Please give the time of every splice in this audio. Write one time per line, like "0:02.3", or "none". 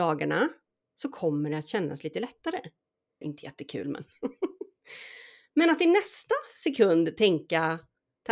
0:03.2